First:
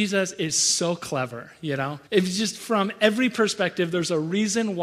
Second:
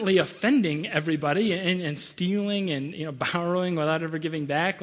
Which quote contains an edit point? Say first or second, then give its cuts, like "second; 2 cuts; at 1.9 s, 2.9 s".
first; 1 cut; at 2.1 s